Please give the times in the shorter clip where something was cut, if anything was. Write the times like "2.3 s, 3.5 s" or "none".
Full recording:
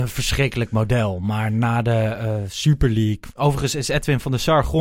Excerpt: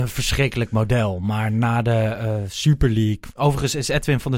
none